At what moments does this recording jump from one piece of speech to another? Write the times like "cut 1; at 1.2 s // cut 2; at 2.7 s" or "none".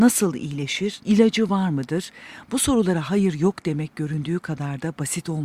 cut 1; at 1.0 s